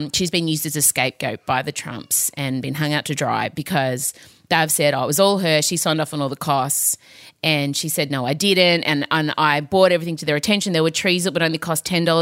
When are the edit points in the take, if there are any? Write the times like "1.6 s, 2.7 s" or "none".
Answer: none